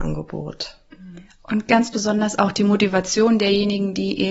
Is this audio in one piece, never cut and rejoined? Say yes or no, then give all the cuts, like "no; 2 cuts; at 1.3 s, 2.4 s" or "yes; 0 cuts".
yes; 0 cuts